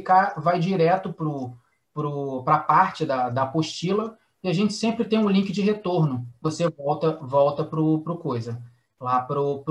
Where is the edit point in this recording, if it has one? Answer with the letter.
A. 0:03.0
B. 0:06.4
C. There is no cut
B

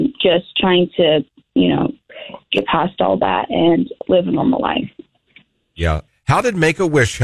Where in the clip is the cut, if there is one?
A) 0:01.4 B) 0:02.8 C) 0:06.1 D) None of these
C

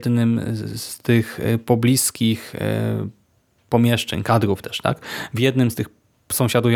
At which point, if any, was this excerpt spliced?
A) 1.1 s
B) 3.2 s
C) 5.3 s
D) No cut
D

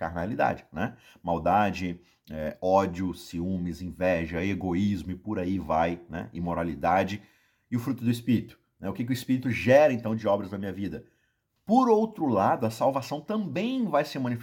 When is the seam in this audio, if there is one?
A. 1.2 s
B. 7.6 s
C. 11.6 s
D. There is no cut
C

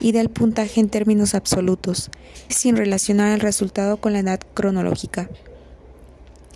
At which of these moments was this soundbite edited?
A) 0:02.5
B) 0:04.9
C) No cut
A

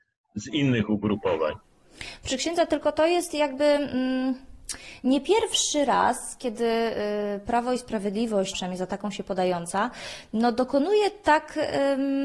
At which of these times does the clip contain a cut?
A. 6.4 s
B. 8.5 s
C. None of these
B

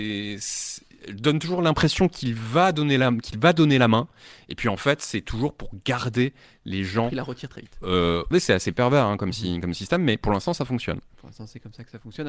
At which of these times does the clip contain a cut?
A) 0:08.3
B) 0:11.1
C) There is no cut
A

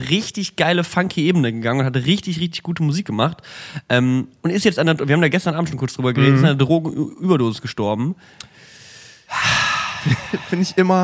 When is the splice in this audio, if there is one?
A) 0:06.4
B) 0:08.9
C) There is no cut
C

